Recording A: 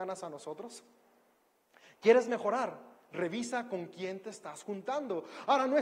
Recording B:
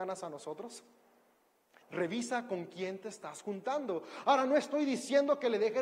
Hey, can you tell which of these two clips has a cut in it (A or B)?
B